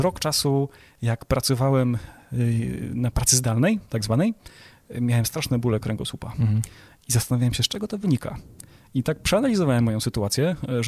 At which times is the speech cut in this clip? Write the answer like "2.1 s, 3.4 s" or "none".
none